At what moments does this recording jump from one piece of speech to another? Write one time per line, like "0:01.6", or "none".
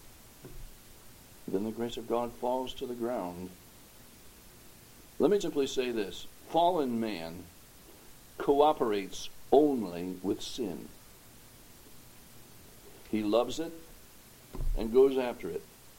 0:05.4